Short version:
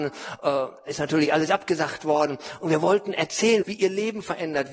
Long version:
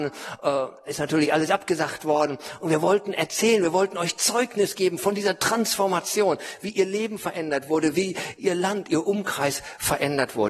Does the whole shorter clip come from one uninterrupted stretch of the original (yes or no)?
no